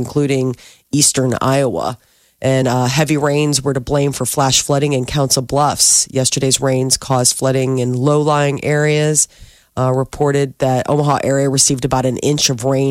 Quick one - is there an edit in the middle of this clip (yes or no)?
no